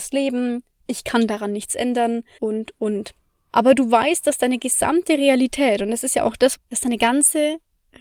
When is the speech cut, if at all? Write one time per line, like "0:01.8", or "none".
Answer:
0:02.4
0:06.6